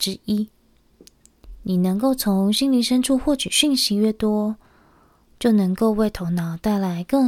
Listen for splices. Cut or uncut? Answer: uncut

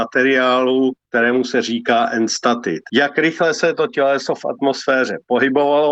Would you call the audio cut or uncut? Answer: cut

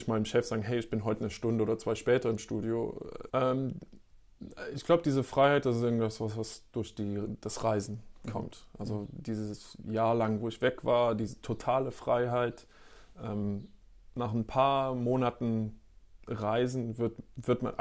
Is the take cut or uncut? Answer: cut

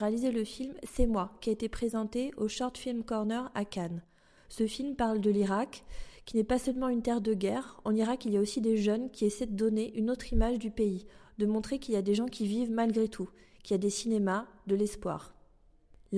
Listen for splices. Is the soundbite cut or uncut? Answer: uncut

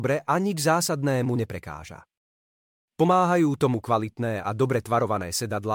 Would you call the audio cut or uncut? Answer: uncut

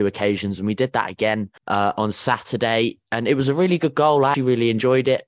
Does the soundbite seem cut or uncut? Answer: cut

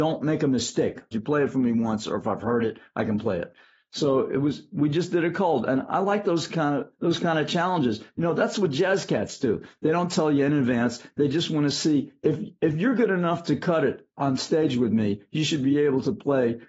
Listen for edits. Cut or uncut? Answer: cut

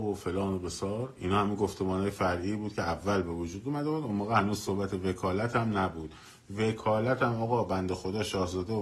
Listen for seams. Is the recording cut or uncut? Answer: uncut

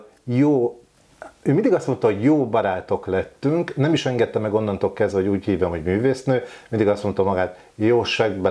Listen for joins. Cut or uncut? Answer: uncut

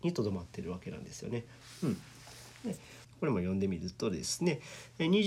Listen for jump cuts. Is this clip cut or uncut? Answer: cut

